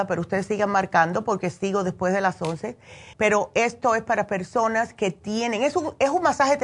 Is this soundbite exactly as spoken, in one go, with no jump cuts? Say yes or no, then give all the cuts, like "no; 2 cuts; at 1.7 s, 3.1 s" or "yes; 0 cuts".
no; 1 cut; at 3.1 s